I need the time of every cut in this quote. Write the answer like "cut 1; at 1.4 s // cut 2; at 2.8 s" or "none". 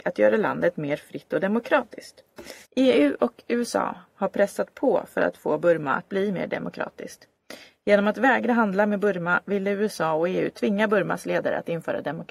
cut 1; at 2.7 s